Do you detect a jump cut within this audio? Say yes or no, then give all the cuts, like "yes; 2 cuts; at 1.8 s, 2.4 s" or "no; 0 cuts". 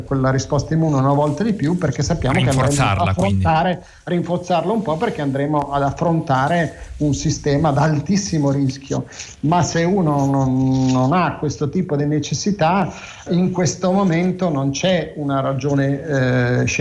yes; 1 cut; at 13.3 s